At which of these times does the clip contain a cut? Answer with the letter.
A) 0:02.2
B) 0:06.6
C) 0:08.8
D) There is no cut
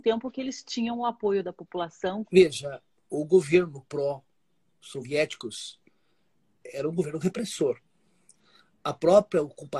A